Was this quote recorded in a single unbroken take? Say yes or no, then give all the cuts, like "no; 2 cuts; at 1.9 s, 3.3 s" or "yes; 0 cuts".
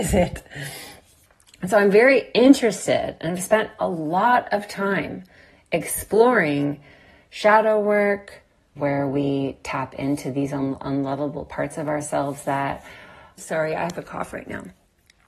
no; 2 cuts; at 8.8 s, 13.4 s